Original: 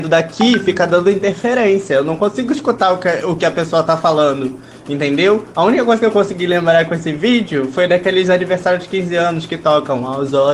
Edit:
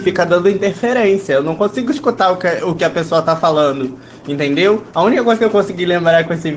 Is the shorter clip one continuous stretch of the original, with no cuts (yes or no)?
yes